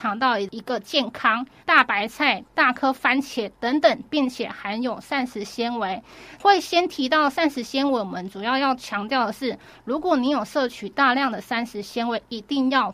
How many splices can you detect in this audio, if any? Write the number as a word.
two